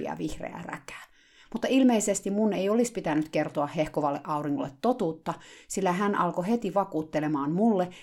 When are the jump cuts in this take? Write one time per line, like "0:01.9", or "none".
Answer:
none